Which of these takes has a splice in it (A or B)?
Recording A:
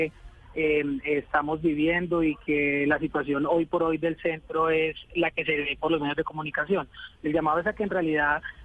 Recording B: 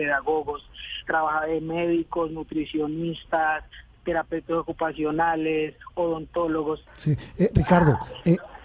B